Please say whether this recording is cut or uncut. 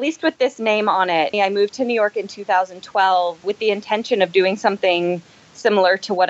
cut